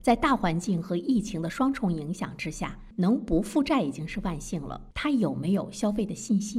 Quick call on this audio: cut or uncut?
uncut